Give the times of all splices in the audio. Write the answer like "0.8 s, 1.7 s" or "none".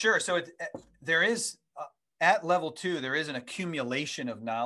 none